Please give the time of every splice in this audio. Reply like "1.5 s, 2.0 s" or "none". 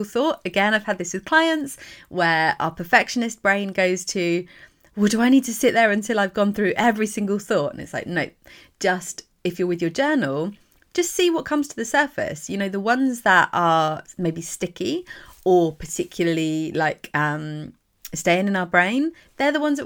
none